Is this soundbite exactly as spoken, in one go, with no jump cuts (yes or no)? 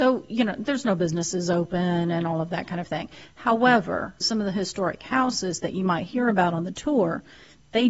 no